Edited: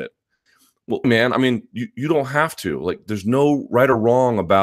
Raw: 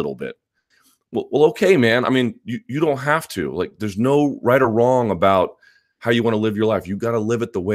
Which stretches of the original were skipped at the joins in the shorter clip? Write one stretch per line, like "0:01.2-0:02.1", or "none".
0:01.3-0:01.8